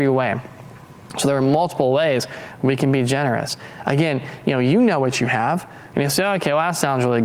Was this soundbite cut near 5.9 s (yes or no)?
yes